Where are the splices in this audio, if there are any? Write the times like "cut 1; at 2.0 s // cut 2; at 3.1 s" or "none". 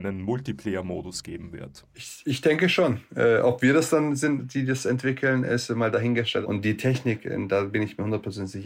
cut 1; at 6.4 s